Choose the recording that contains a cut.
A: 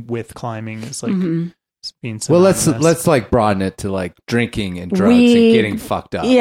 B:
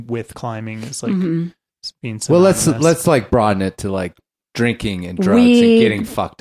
A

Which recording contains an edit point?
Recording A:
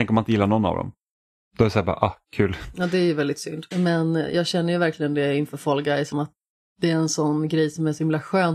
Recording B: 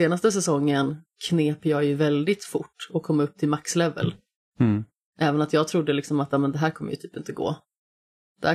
A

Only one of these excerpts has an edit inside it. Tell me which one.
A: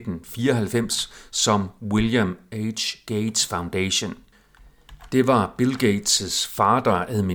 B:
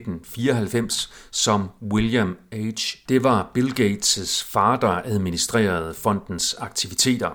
B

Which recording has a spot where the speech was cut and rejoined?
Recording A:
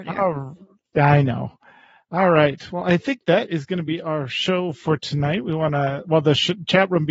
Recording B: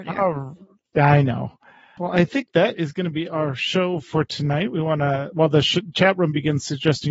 B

